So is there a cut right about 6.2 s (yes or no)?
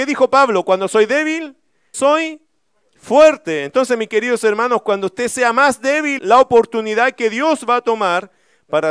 yes